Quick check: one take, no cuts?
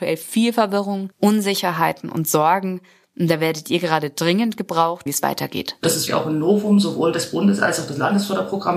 no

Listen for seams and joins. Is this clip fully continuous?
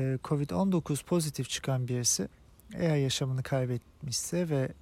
yes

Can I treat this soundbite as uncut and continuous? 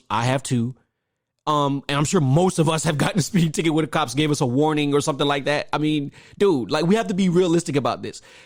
yes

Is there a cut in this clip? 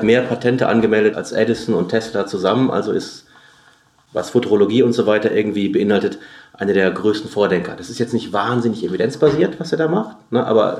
no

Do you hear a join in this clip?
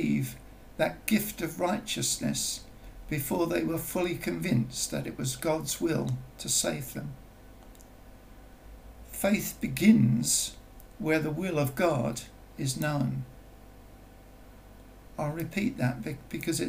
no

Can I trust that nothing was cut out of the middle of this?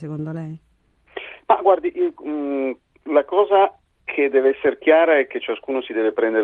yes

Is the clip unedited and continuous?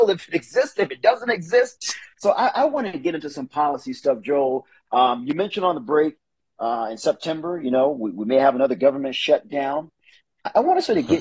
no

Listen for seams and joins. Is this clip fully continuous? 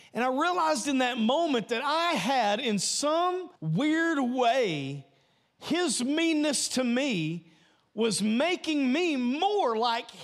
no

